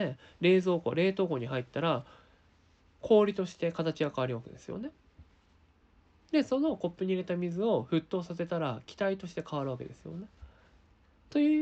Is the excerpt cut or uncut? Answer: uncut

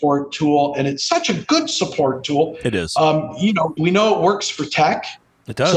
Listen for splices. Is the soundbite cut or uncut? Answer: cut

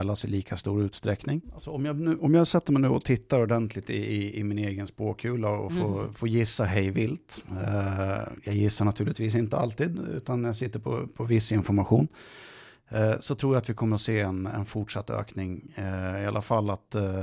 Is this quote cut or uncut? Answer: cut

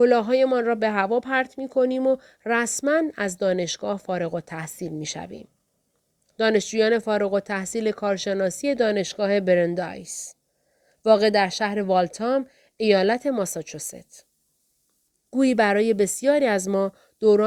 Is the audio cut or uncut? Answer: uncut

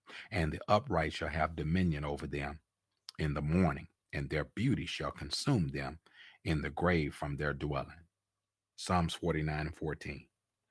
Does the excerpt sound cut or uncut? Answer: cut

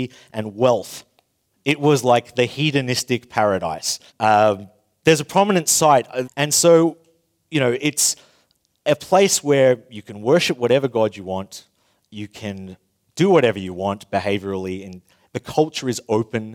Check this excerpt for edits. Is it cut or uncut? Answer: cut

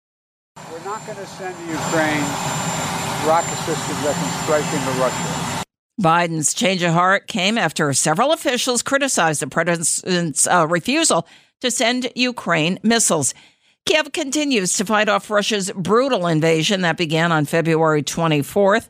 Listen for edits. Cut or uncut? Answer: uncut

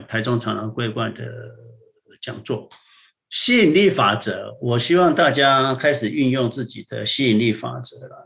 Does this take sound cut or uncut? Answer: cut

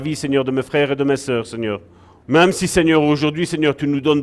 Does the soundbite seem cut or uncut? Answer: cut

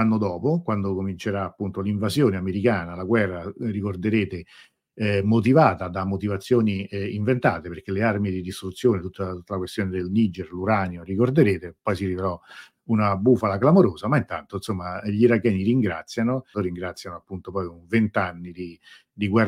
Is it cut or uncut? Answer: cut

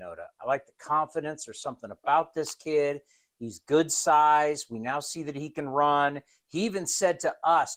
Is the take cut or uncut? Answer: uncut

